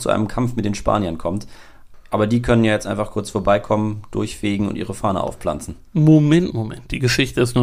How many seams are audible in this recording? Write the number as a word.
one